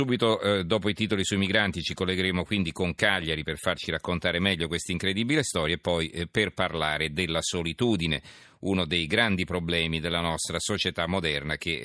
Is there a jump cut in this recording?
no; 0 cuts

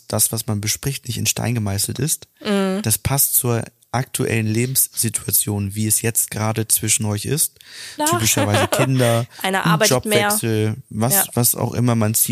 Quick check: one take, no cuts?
no; 1 cut; at 8.0 s

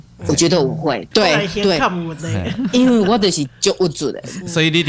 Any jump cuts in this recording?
yes; 1 cut; at 1.1 s

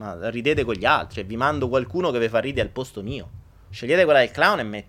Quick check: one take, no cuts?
no; 1 cut; at 3.7 s

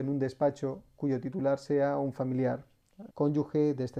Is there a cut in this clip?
yes; 1 cut; at 3.1 s

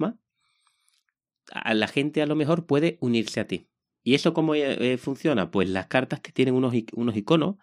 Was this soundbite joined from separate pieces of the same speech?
no; 0 cuts

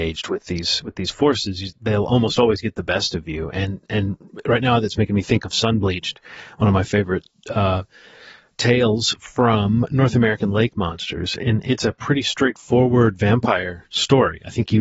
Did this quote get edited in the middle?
no; 0 cuts

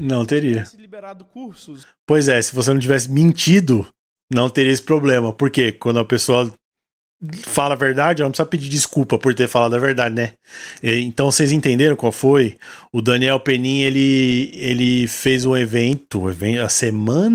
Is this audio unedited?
yes; 0 cuts

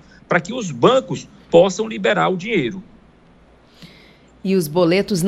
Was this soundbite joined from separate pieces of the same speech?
no; 0 cuts

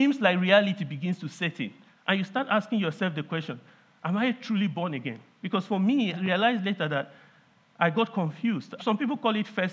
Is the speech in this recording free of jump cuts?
no; 2 cuts; at 6.1 s, 8.8 s

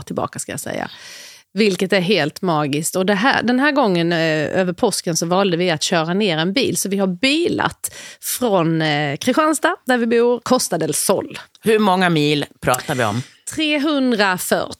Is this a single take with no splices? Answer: no; 1 cut; at 10.4 s

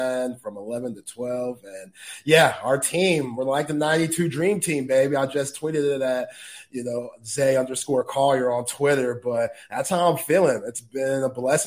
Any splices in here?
no; 0 cuts

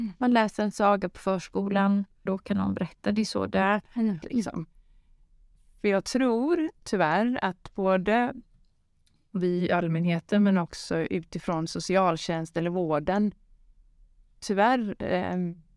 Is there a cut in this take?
yes; 2 cuts; at 2.3 s, 4.2 s

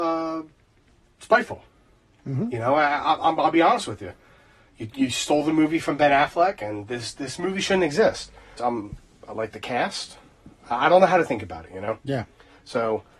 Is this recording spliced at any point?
yes; 1 cut; at 8.6 s

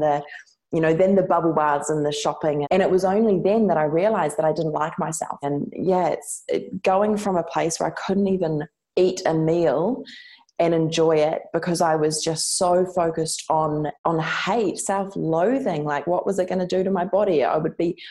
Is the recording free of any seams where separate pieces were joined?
no; 3 cuts; at 2.6 s, 5.4 s, 14.0 s

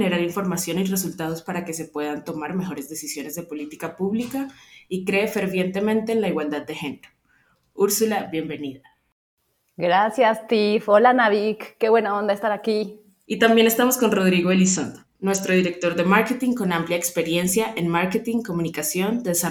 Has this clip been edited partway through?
no; 0 cuts

